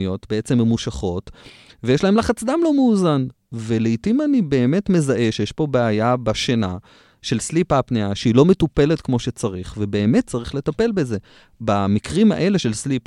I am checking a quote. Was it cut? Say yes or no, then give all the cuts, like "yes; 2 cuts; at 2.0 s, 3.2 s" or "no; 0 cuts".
no; 0 cuts